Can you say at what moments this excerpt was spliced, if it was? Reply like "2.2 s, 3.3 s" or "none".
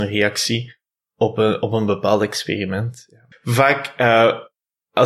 3.3 s